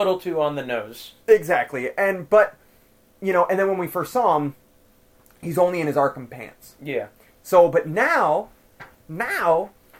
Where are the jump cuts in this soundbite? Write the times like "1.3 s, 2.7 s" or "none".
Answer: none